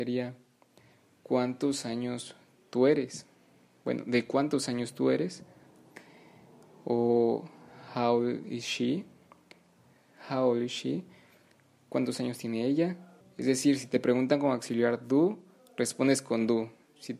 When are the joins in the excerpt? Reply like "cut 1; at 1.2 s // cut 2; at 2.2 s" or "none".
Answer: cut 1; at 13.2 s